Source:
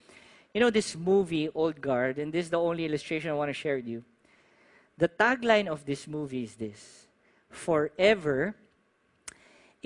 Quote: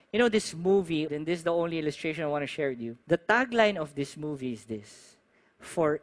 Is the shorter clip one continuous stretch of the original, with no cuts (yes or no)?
no